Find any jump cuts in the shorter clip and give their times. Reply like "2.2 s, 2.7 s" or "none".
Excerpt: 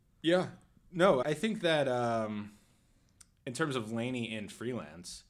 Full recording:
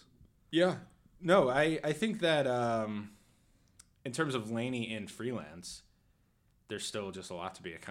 1.2 s